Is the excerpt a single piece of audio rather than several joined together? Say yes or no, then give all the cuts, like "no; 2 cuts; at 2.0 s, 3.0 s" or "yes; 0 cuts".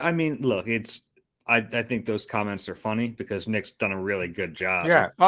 yes; 0 cuts